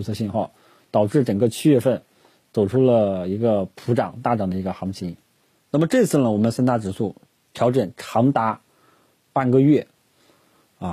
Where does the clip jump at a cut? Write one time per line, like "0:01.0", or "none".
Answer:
none